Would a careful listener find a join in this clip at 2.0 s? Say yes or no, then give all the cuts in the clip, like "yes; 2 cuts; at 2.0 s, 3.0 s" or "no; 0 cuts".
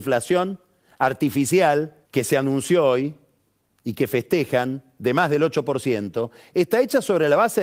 yes; 1 cut; at 2.0 s